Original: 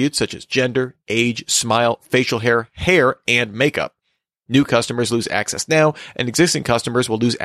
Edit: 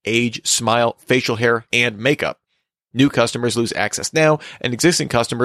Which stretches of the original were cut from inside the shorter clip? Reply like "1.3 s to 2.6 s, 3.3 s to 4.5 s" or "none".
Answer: 2.7 s to 3.2 s